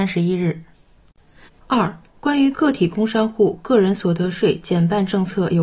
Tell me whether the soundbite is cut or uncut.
cut